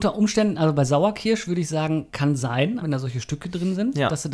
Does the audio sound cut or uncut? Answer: cut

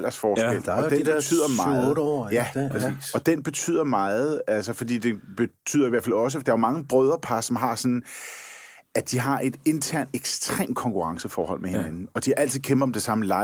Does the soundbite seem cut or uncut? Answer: uncut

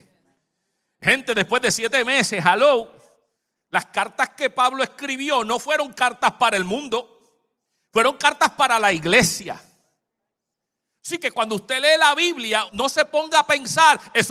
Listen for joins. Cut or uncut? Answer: cut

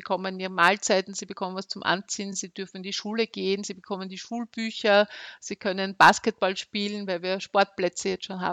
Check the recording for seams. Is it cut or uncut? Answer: uncut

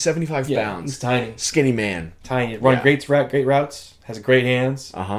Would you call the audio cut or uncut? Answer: uncut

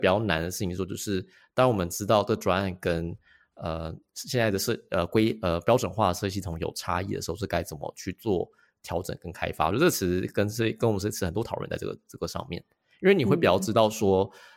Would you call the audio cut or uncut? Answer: uncut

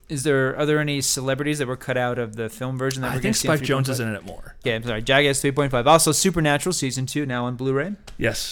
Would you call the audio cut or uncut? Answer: cut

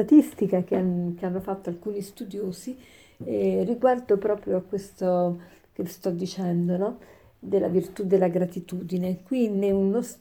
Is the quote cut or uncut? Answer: uncut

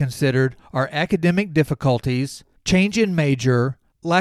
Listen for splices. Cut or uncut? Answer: uncut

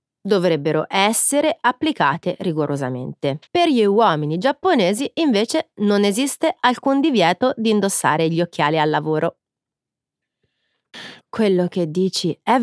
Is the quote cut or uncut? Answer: cut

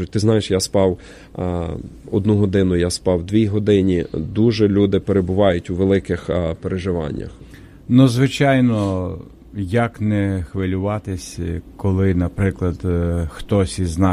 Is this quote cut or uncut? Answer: uncut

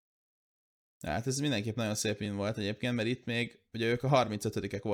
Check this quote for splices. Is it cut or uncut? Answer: uncut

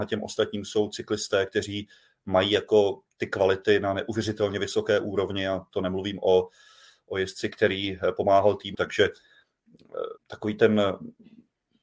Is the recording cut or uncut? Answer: cut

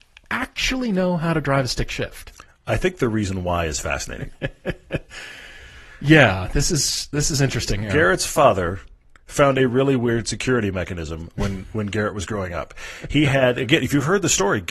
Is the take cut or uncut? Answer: uncut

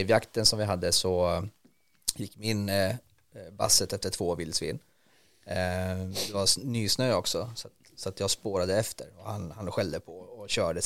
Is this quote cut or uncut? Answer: uncut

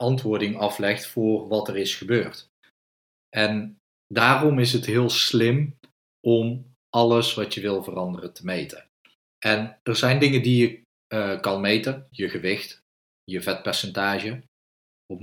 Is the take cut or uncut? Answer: cut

